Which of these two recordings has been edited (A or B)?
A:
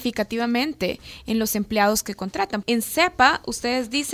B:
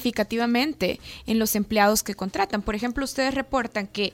A